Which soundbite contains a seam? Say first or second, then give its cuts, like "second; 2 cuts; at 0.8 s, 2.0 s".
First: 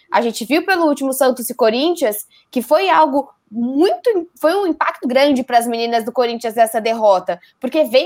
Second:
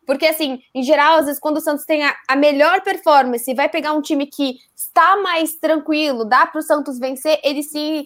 first; 1 cut; at 5.0 s